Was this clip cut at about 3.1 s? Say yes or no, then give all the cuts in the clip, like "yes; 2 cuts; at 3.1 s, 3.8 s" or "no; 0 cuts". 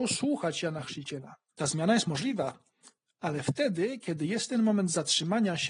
no; 1 cut; at 1.5 s